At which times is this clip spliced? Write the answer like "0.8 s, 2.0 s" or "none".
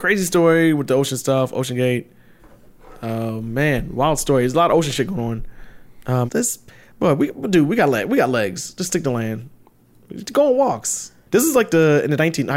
6.3 s, 11.3 s